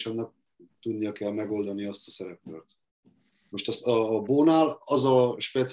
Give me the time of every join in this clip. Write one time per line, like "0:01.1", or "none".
0:03.5

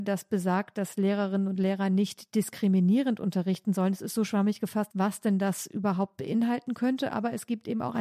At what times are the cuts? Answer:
0:04.9

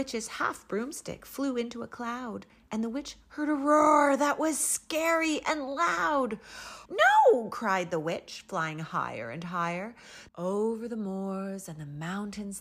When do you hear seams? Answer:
0:06.9
0:10.3

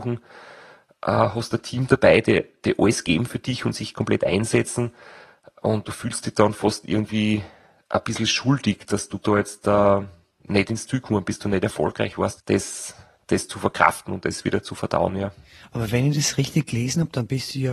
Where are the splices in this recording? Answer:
0:12.4

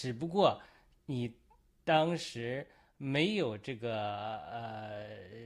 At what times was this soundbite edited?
none

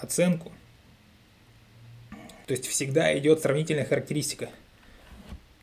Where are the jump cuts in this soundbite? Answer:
0:02.4

